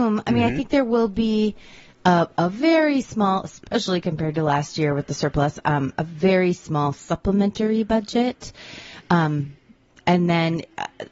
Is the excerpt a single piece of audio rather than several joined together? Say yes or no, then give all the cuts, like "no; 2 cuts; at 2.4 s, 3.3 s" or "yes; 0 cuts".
yes; 0 cuts